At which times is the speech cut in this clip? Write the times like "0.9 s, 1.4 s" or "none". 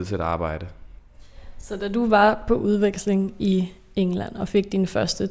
none

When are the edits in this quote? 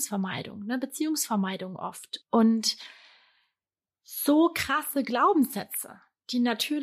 2.2 s

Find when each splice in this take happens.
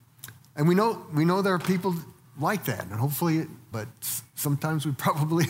3.7 s

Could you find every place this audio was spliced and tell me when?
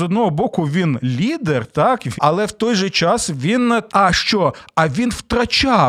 2.2 s, 3.9 s

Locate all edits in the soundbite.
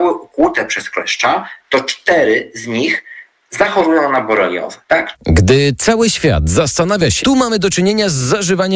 5.1 s, 7.2 s

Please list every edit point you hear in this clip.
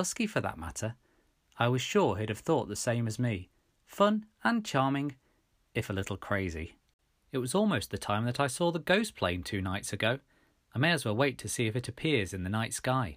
7.2 s

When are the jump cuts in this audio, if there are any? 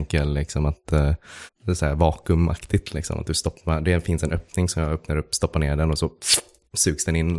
1.5 s

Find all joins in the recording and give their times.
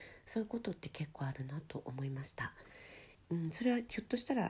3.1 s

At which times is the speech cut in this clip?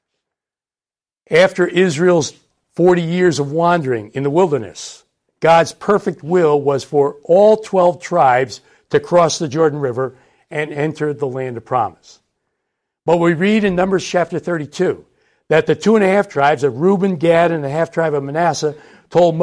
none

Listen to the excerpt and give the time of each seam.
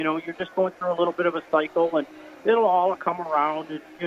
none

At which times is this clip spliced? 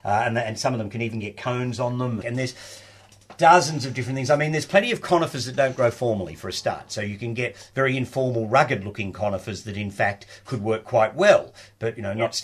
2.2 s

